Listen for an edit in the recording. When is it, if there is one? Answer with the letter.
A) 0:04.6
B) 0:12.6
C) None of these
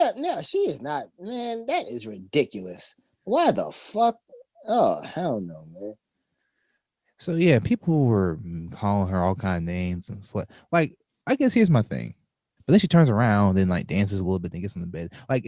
B